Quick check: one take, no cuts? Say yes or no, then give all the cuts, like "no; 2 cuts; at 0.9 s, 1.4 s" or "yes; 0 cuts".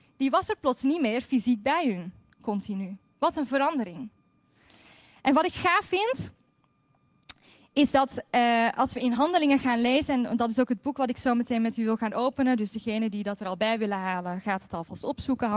yes; 0 cuts